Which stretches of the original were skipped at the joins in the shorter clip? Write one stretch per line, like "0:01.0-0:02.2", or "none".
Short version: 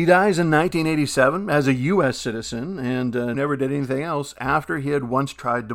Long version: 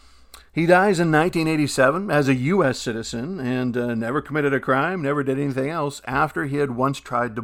0:03.9-0:05.0